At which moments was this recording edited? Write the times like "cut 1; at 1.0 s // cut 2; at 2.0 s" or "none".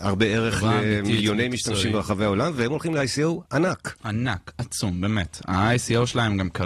none